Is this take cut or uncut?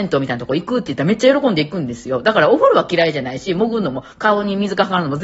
uncut